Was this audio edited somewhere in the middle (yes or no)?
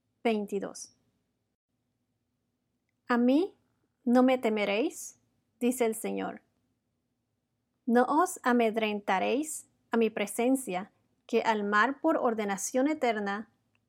no